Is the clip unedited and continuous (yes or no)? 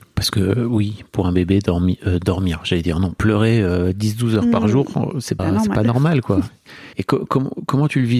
no